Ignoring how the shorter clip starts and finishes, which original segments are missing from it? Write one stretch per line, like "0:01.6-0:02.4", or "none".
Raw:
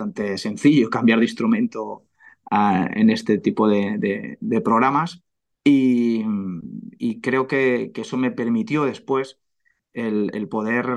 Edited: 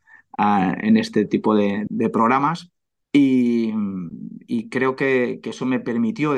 0:04.0-0:04.4

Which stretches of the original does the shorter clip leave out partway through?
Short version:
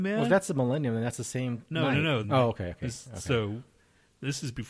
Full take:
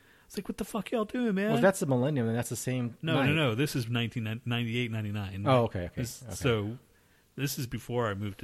0:03.6-0:05.4

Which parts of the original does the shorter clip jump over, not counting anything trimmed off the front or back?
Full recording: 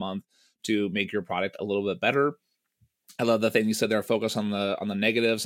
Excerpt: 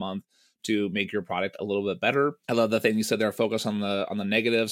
0:02.4-0:03.1

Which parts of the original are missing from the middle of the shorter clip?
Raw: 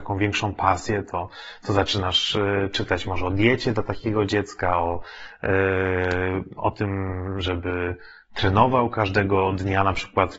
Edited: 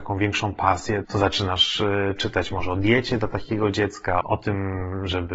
0:01.0-0:01.6
0:04.8-0:06.5

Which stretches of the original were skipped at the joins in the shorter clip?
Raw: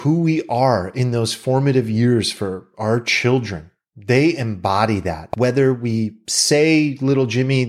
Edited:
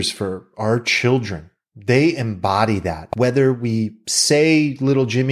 none

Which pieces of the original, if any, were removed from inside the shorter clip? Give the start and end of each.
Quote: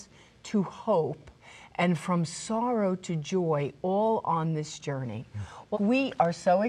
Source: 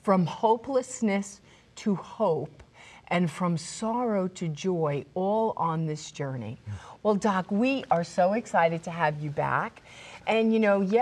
0:07.1-0:07.4

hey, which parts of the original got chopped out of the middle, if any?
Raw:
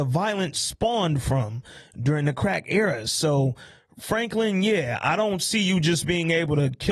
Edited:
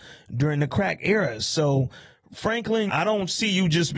0:04.5-0:05.0

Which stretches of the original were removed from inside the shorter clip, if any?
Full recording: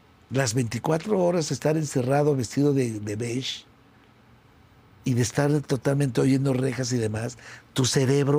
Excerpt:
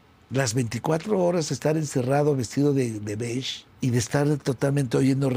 0:03.7-0:04.9

